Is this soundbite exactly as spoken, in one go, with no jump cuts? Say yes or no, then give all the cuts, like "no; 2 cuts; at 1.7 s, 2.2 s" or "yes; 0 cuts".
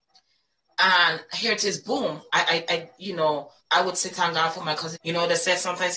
no; 3 cuts; at 2.3 s, 3.6 s, 4.9 s